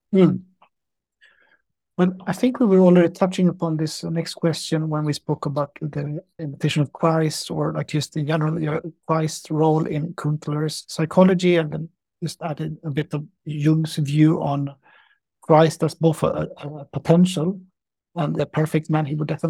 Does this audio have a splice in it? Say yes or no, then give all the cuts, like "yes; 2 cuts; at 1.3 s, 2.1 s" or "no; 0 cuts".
no; 0 cuts